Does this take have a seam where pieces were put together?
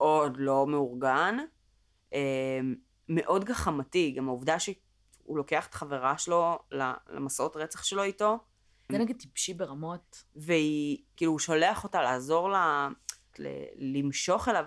yes; 3 cuts; at 8.9 s, 11.2 s, 13.3 s

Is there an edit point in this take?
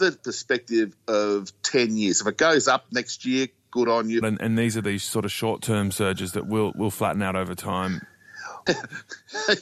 yes; 2 cuts; at 4.2 s, 8.7 s

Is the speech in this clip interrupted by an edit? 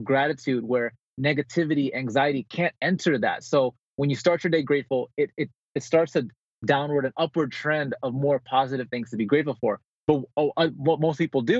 no; 0 cuts

